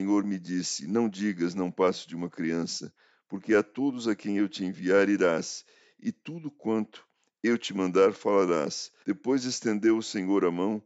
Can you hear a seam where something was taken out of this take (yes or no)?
yes